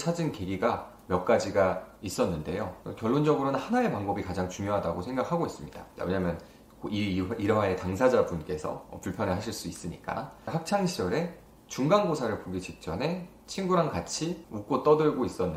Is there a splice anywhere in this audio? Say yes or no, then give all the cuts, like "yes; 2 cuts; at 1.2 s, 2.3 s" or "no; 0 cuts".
yes; 1 cut; at 6.0 s